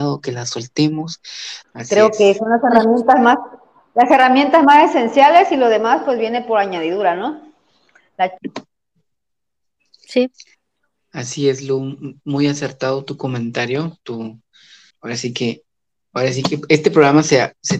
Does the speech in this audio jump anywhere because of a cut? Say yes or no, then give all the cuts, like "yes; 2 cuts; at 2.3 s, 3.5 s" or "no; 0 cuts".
yes; 2 cuts; at 1.6 s, 14.9 s